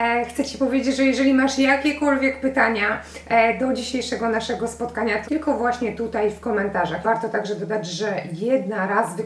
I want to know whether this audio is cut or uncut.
cut